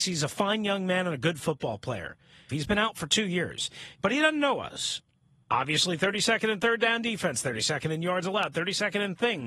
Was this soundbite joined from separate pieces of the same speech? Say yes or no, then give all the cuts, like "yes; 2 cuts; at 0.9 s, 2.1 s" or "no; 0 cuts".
yes; 3 cuts; at 2.5 s, 4.0 s, 5.4 s